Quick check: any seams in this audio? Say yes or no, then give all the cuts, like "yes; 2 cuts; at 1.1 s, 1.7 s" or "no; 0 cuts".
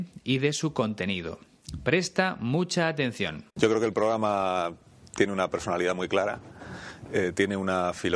yes; 1 cut; at 3.5 s